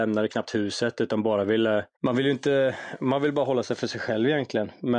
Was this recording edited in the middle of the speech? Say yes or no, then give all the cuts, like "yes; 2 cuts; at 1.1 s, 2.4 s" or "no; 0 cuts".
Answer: yes; 1 cut; at 1.9 s